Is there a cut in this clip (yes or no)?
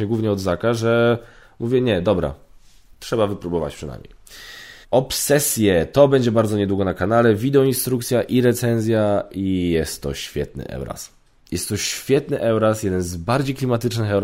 yes